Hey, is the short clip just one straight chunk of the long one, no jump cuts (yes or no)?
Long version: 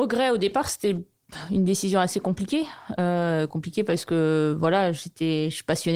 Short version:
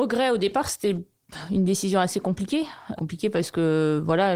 no